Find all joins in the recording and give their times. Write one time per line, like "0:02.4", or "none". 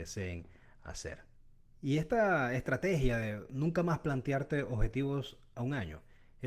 none